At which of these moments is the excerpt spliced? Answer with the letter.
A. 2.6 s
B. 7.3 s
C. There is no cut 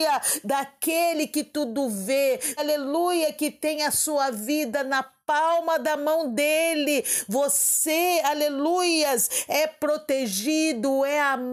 A